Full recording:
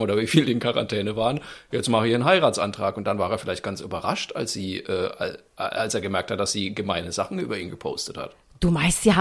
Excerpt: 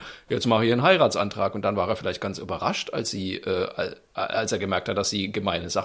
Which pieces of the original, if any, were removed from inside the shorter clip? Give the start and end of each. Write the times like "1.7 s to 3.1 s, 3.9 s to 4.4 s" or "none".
none